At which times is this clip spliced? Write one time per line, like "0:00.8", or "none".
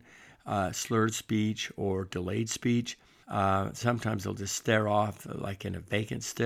0:03.2